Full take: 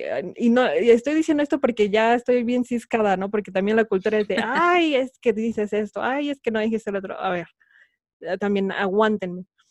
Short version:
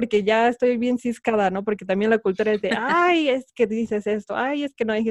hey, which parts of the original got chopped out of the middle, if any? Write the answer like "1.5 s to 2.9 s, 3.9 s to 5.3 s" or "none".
none